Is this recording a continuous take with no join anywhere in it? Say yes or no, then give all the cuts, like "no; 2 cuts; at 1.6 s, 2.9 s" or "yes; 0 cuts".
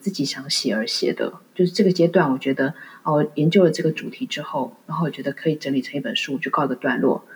yes; 0 cuts